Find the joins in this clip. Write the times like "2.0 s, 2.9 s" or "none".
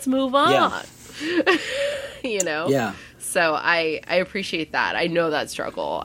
none